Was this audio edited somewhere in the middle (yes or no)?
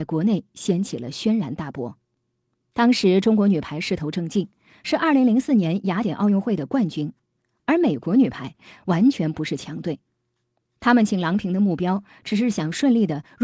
no